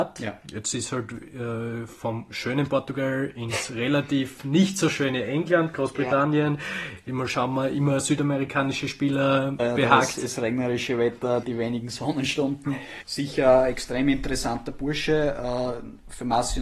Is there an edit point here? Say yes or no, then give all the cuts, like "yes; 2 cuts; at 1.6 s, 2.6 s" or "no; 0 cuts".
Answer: yes; 3 cuts; at 9.6 s, 11.4 s, 13.0 s